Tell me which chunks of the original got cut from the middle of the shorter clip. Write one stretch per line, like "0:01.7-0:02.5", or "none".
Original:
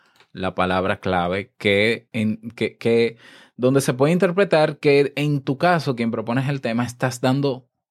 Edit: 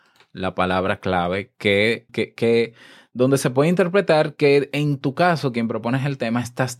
0:02.1-0:02.5